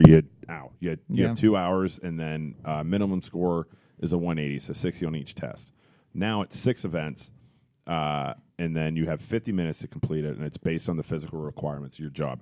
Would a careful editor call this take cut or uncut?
cut